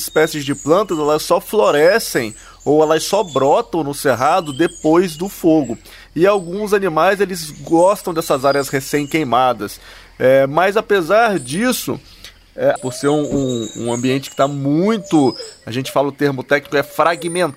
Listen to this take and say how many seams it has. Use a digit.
1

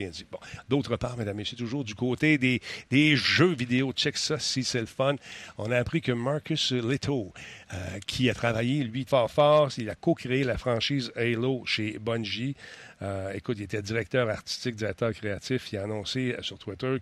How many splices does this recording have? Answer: 1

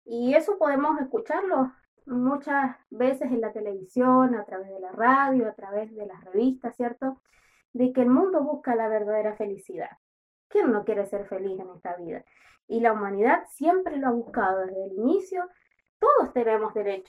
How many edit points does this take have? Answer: 2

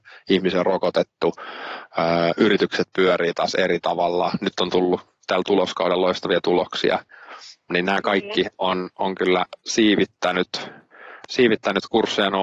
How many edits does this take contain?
0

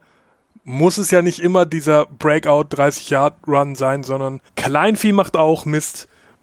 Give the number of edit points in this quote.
1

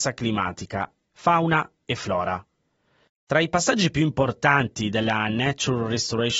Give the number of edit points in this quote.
1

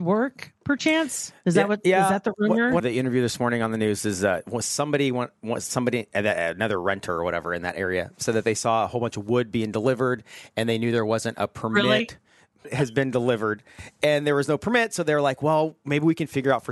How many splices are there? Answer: 2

